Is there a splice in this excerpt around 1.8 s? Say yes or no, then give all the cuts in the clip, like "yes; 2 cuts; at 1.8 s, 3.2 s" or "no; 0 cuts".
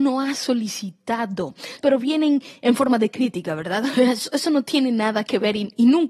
yes; 1 cut; at 1.8 s